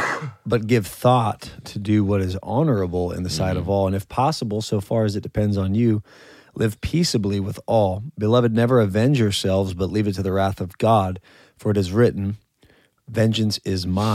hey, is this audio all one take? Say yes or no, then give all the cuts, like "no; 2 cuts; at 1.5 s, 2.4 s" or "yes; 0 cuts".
yes; 0 cuts